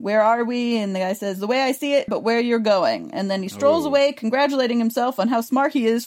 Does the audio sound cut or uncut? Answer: cut